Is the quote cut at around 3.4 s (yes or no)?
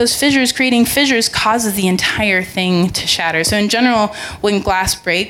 no